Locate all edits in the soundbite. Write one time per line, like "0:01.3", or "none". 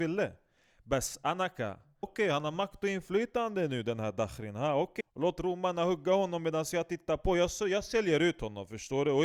0:02.0
0:05.0